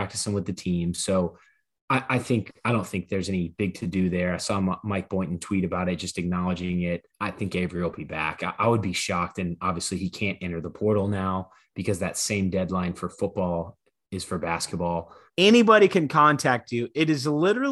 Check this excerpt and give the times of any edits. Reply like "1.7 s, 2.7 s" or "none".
7.1 s, 15.3 s